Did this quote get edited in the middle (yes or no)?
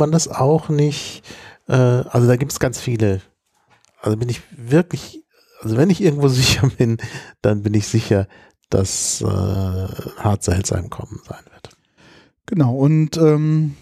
no